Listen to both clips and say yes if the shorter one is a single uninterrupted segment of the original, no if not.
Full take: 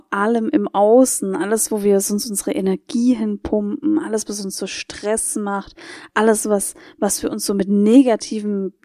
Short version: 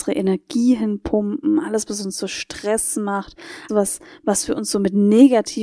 no